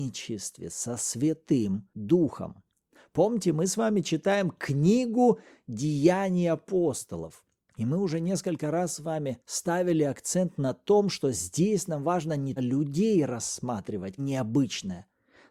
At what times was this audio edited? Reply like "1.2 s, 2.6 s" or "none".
12.6 s, 14.2 s